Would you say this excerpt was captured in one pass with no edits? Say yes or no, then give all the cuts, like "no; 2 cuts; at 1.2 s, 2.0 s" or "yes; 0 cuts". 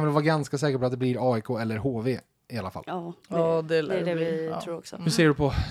yes; 0 cuts